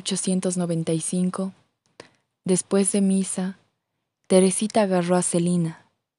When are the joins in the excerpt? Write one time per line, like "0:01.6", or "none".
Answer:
none